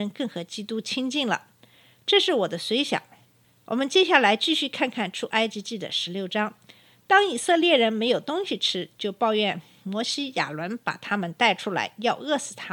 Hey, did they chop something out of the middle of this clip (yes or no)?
no